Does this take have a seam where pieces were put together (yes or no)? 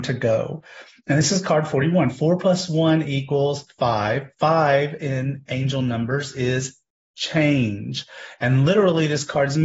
no